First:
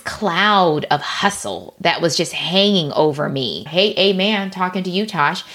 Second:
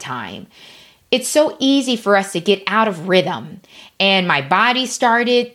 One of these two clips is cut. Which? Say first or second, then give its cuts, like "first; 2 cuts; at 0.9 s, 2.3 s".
first; 1 cut; at 3.7 s